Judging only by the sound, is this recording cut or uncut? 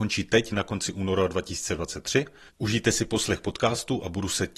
cut